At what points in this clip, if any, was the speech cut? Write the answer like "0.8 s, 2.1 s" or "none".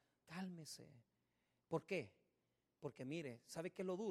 none